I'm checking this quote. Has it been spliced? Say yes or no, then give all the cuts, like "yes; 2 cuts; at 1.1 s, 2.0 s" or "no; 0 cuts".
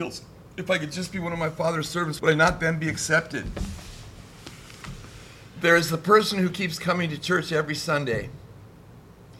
yes; 1 cut; at 2.2 s